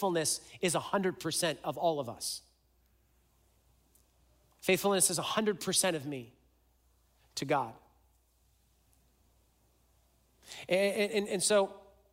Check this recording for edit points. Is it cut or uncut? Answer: uncut